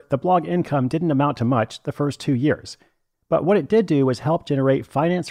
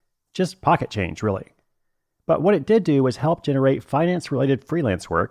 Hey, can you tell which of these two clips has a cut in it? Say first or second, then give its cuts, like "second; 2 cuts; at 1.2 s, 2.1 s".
first; 1 cut; at 3.1 s